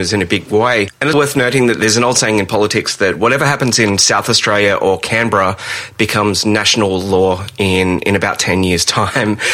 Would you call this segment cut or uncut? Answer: cut